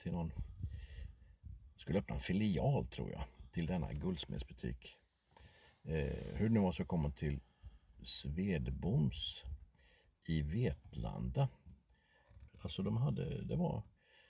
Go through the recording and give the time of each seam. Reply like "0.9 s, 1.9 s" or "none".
12.5 s